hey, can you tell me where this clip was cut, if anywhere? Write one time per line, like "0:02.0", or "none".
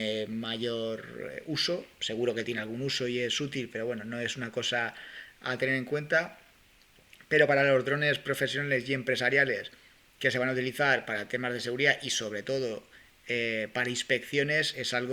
none